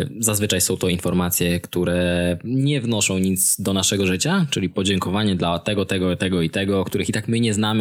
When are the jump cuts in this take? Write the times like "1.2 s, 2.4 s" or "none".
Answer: none